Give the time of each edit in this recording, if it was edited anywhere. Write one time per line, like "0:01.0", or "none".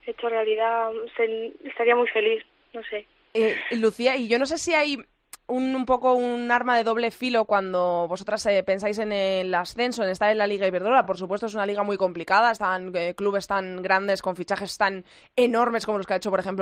none